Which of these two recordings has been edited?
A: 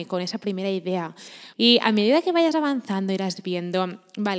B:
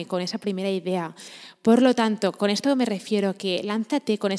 A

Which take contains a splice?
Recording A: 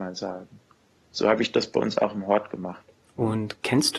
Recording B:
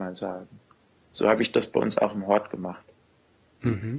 A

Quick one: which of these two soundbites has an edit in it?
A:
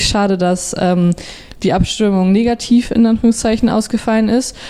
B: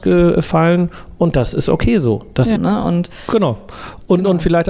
B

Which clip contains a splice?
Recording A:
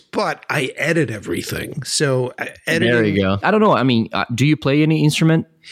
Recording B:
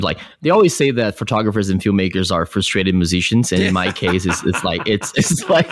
A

